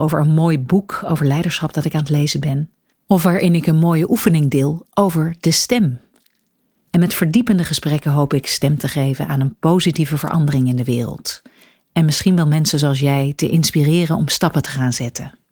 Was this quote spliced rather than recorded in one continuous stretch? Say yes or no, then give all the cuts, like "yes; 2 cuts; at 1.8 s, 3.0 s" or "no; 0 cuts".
yes; 1 cut; at 6.9 s